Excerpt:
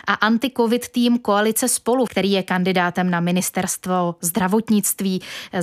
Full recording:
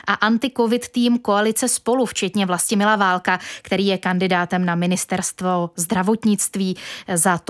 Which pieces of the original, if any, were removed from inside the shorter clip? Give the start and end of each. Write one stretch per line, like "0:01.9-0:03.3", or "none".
0:02.1-0:03.6